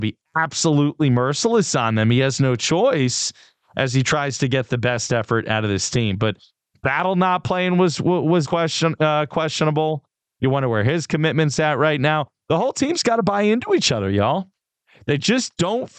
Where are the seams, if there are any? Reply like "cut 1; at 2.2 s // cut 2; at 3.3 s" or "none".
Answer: cut 1; at 8.4 s